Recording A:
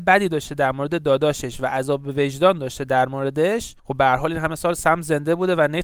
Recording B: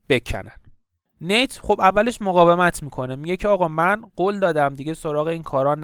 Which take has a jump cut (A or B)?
A